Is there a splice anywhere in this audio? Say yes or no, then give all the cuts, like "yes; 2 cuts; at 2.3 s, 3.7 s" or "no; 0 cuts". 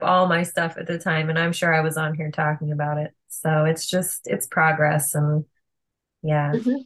no; 0 cuts